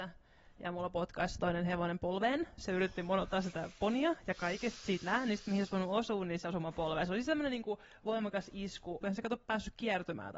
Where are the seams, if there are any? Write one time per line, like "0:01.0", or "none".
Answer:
0:09.0